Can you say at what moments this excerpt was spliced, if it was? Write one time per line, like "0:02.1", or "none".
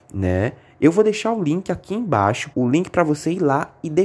0:02.5